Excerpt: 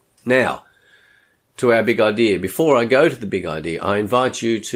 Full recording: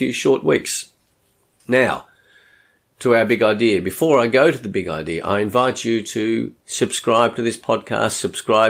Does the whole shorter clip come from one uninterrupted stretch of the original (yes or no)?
yes